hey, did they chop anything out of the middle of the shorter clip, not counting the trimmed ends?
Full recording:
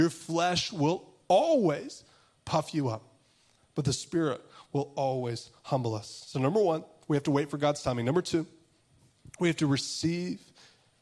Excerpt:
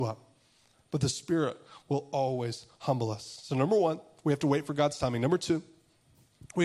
no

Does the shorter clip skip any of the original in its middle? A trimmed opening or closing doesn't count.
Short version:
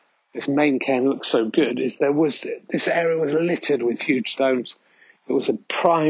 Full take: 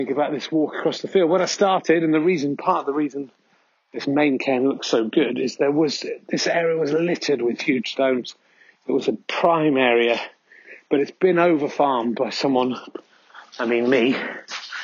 no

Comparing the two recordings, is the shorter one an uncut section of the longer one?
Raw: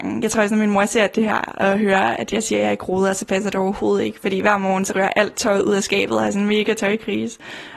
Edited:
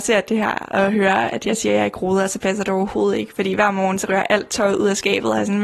yes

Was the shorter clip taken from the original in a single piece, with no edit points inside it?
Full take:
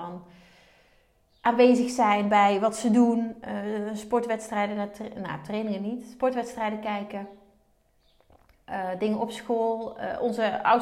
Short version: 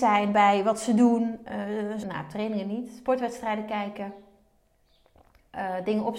no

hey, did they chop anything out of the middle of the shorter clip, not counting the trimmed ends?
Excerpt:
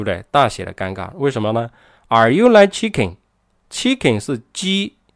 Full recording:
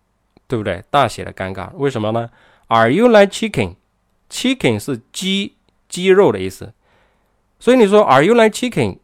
no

